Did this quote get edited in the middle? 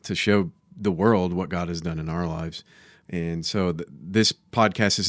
no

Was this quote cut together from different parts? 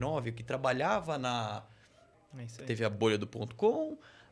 yes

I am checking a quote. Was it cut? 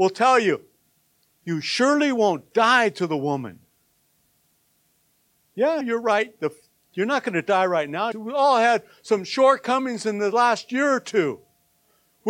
yes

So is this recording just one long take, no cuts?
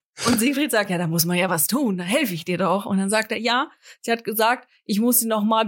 yes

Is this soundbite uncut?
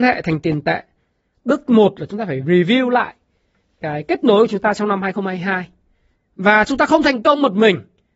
no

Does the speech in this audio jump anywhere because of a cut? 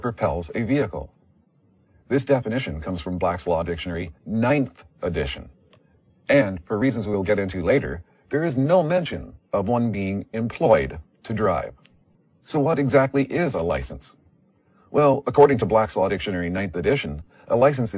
no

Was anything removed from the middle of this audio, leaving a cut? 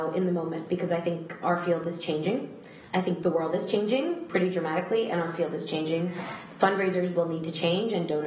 yes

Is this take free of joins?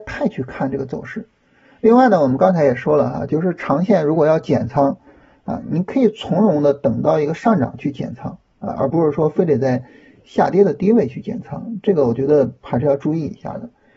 yes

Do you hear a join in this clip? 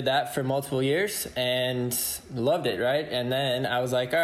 no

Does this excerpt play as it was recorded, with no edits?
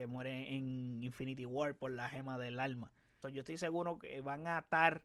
no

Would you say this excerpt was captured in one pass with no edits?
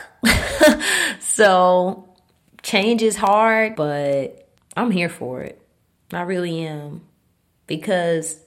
no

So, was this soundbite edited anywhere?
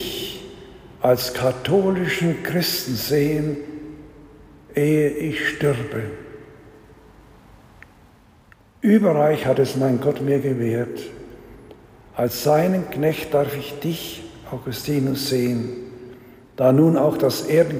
no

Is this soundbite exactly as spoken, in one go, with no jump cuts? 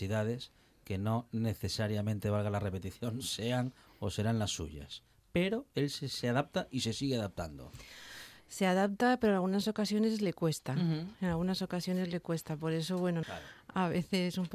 no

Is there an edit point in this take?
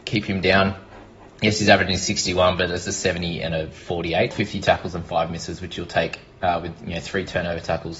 yes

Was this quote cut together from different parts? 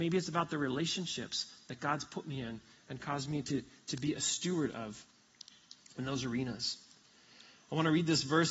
no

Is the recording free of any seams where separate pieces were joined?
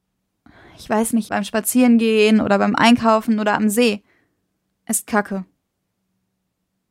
no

